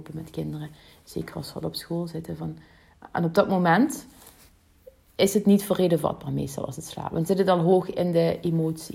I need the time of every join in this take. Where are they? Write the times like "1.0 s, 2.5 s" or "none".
none

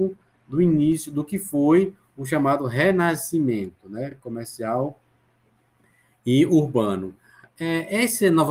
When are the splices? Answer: none

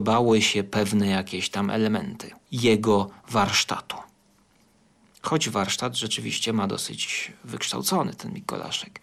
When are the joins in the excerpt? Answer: none

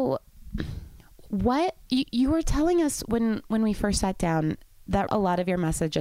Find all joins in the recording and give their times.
5.1 s

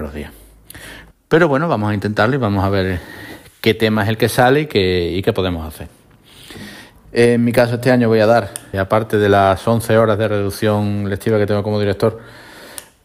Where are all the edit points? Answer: 1.1 s, 7.0 s, 8.7 s

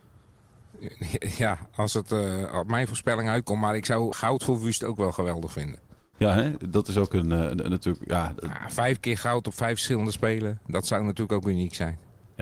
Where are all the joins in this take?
4.1 s

